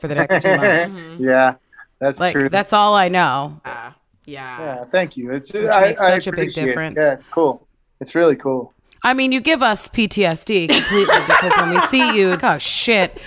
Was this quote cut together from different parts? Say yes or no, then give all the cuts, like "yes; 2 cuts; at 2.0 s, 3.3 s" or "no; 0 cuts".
yes; 2 cuts; at 3.6 s, 12.4 s